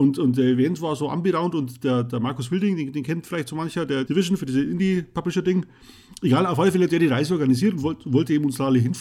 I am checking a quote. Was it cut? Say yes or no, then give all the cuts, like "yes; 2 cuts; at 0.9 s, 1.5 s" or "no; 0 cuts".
yes; 1 cut; at 4.1 s